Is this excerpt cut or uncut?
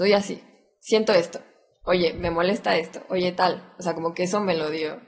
uncut